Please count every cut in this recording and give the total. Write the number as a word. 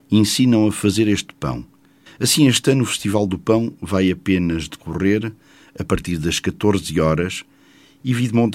one